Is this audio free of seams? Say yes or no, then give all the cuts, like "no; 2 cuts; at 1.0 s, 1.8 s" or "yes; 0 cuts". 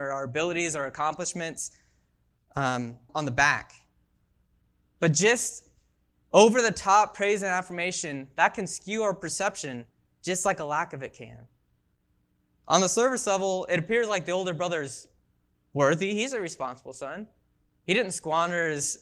no; 2 cuts; at 3.1 s, 12.6 s